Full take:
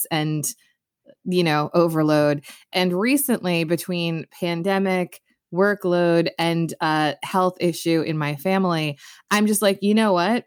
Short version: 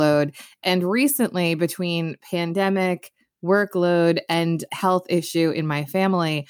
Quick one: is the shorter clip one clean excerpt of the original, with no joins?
no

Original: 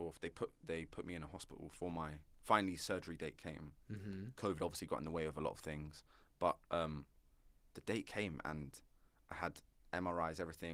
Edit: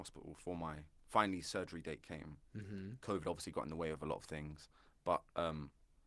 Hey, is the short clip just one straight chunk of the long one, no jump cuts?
yes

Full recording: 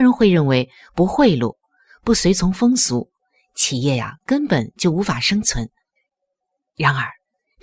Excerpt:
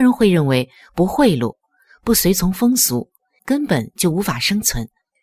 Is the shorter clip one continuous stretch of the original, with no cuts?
no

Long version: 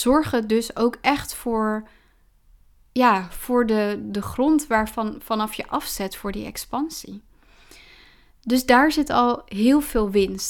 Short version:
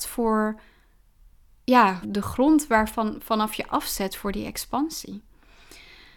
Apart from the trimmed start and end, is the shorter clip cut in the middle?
yes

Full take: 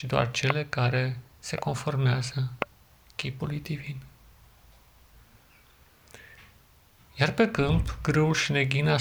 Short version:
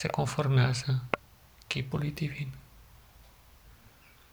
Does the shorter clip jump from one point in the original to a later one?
no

